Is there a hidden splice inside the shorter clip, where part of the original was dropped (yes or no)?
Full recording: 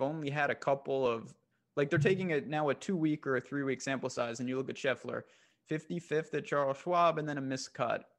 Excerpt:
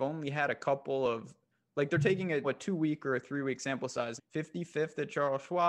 yes